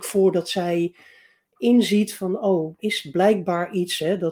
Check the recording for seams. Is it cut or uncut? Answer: cut